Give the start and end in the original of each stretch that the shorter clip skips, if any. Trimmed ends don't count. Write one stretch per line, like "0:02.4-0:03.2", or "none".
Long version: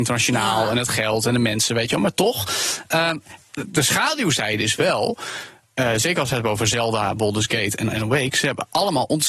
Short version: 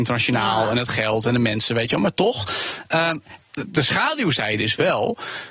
none